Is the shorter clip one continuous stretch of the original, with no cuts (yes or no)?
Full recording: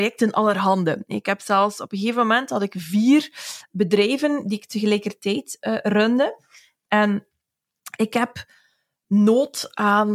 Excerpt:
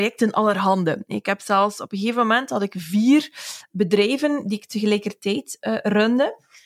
yes